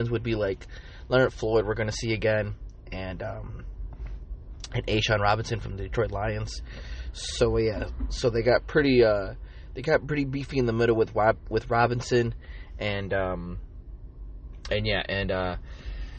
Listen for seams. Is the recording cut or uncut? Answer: uncut